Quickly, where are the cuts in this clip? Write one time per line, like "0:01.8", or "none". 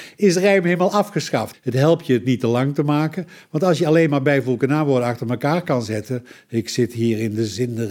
0:01.5